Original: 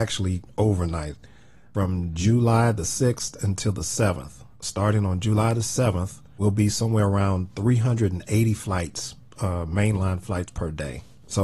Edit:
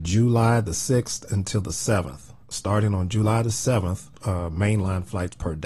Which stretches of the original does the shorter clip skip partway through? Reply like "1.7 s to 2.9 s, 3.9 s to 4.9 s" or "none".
6.3 s to 9.3 s